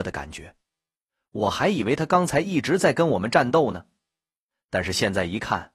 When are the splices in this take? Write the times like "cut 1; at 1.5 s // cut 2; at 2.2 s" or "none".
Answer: none